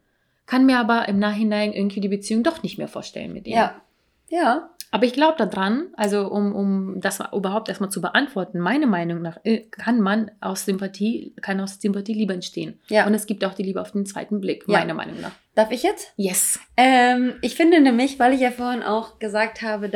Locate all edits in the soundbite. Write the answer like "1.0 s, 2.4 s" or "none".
none